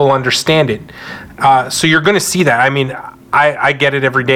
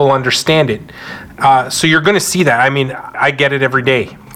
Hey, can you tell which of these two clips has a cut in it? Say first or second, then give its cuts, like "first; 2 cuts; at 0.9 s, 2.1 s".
second; 1 cut; at 3.1 s